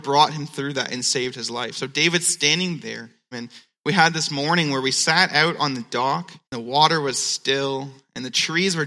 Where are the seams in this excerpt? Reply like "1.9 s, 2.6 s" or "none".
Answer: 3.3 s, 6.4 s